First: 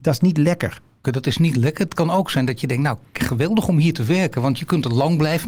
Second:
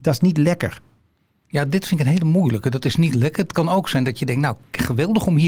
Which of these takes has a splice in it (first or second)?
first